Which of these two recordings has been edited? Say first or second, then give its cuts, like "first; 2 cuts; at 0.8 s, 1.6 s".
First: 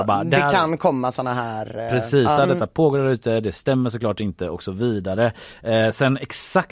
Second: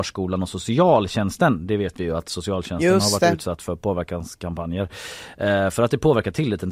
first; 1 cut; at 2.4 s